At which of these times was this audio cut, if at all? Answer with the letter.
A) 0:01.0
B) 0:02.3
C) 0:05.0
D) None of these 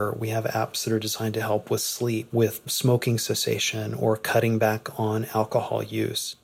B